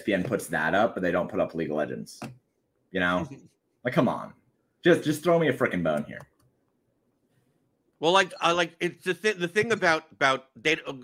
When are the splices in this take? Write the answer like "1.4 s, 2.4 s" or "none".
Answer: none